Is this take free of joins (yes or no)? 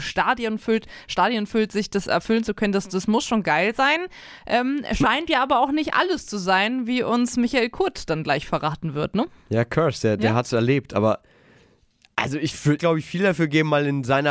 no